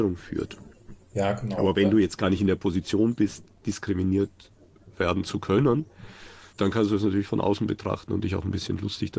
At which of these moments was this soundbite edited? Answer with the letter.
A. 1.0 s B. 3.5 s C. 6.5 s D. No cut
C